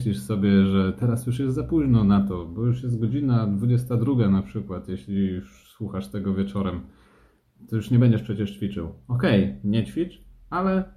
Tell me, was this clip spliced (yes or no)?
no